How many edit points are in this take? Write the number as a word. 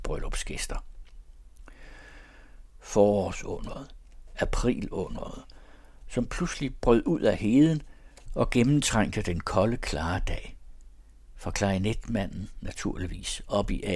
one